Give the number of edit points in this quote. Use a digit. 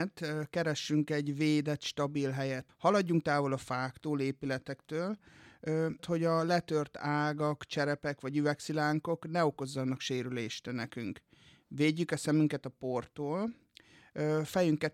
2